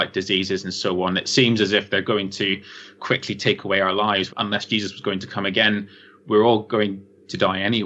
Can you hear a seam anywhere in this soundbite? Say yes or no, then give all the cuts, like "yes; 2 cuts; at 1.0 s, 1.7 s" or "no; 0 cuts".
yes; 1 cut; at 4.3 s